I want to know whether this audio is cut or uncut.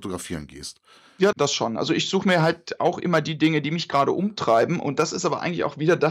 cut